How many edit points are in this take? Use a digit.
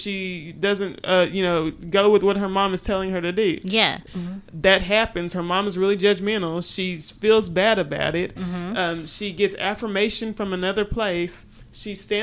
1